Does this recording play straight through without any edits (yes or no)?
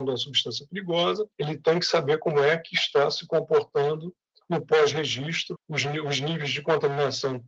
no